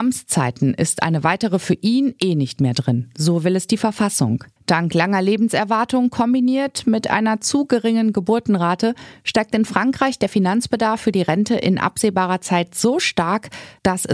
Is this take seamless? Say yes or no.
no